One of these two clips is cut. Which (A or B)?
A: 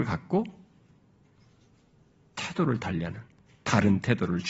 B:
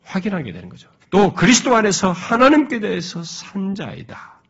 B